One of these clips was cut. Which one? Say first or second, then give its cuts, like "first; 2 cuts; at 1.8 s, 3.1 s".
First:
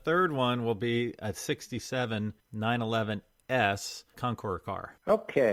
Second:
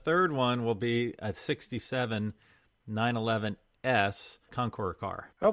first; 1 cut; at 2.4 s